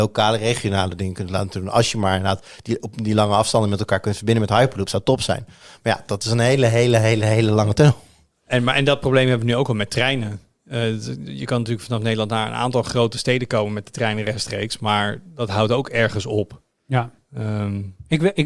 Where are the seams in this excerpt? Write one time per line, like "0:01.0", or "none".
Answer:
none

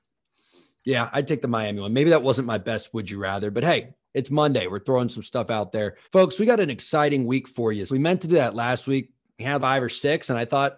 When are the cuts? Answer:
0:06.0
0:07.9
0:09.6

